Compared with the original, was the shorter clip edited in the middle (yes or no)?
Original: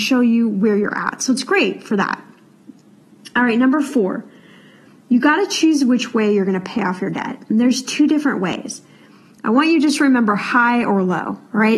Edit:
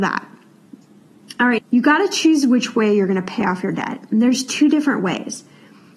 yes